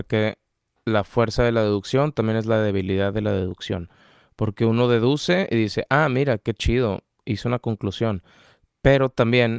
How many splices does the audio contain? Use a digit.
0